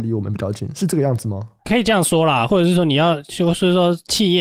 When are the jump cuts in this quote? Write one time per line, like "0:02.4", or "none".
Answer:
none